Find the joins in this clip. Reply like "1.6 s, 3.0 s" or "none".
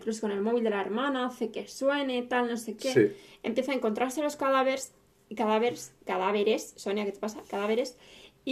none